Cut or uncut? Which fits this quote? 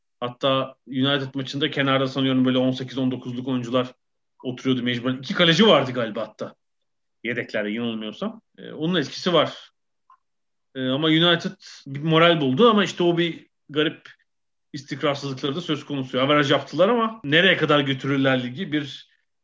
cut